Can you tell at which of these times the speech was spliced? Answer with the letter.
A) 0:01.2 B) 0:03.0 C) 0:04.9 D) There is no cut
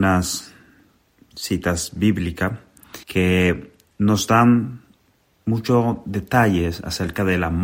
B